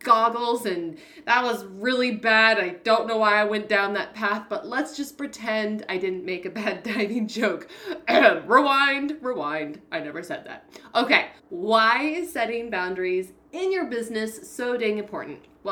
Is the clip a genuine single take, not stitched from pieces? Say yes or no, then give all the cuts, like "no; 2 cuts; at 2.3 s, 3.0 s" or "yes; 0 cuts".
no; 1 cut; at 11.4 s